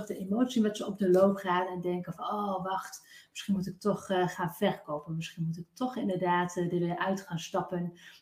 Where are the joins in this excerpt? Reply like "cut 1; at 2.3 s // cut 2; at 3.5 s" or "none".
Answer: none

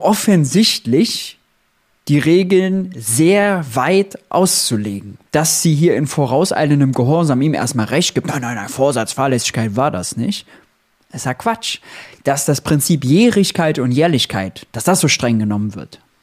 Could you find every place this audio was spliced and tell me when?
none

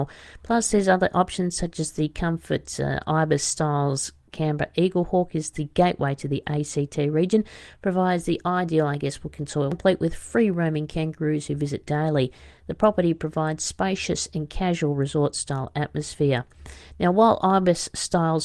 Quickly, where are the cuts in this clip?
none

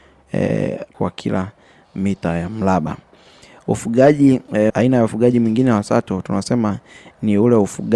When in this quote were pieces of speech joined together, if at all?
cut 1; at 0.9 s // cut 2; at 4.7 s

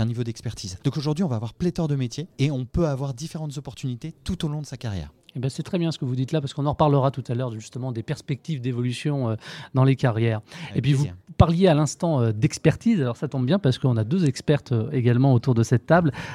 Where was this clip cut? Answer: none

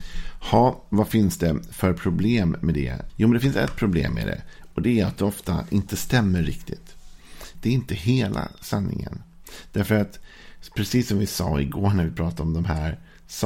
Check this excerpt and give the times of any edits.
cut 1; at 3.1 s // cut 2; at 7.5 s

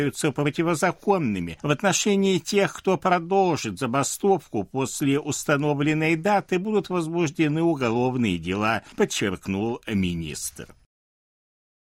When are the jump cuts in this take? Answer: none

